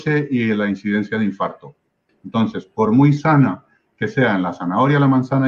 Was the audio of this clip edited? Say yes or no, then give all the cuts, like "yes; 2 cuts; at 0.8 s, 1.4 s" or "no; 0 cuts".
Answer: yes; 1 cut; at 2.1 s